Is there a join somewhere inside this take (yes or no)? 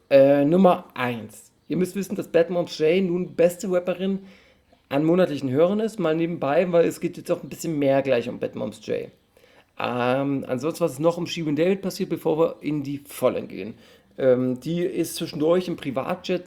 no